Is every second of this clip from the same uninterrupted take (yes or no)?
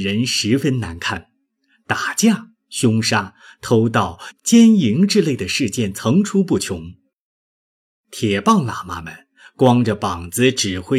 no